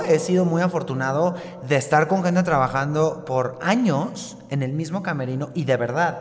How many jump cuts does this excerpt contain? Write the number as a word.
zero